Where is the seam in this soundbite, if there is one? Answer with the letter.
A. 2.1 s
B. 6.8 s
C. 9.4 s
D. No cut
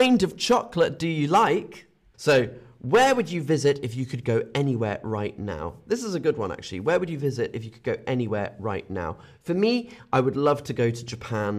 A